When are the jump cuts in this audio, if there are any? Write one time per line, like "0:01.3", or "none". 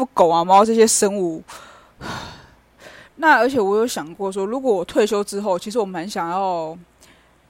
0:03.1